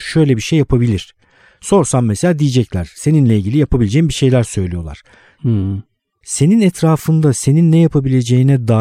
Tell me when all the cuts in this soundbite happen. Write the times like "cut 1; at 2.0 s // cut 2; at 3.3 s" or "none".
cut 1; at 5.4 s